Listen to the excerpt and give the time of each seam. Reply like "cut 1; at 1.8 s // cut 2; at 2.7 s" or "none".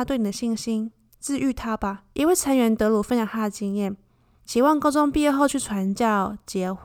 cut 1; at 2.1 s // cut 2; at 4.4 s